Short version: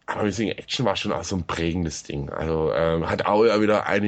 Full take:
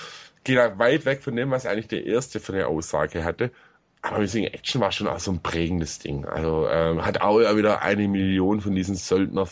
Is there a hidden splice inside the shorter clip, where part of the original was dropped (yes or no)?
no